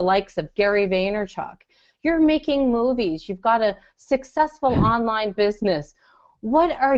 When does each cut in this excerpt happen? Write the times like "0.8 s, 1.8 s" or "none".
none